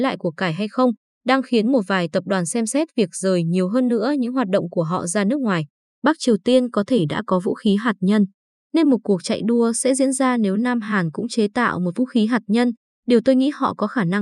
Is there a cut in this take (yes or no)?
yes